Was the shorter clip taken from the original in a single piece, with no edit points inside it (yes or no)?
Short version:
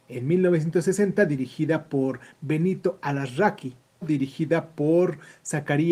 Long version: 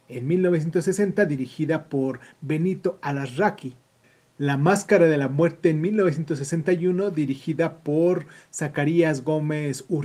no